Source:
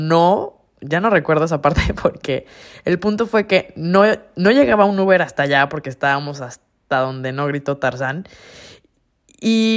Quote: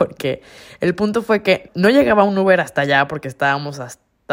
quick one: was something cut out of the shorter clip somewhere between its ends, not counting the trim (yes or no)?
yes